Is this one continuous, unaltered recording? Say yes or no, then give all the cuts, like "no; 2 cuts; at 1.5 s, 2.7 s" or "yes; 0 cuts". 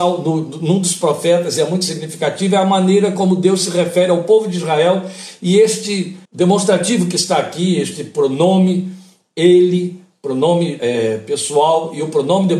no; 2 cuts; at 6.2 s, 10.8 s